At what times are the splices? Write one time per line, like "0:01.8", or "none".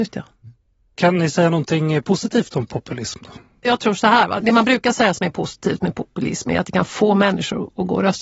0:04.4